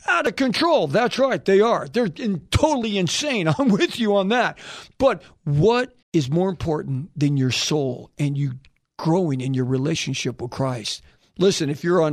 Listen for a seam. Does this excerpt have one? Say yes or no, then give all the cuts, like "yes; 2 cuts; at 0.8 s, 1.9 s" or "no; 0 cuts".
yes; 1 cut; at 6.0 s